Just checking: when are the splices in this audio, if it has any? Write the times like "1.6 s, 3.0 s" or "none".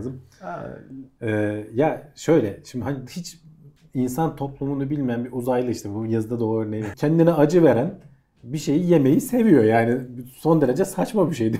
6.9 s